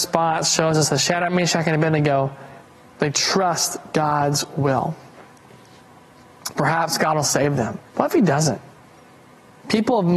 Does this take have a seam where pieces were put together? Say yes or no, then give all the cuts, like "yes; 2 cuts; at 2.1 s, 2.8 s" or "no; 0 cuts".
yes; 1 cut; at 7.9 s